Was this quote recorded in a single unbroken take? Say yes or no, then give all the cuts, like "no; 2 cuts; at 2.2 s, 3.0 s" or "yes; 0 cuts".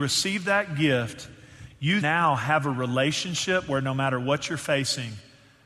no; 1 cut; at 2.0 s